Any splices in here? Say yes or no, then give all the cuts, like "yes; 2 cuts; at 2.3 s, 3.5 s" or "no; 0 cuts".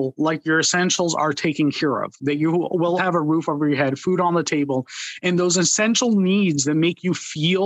yes; 1 cut; at 3.0 s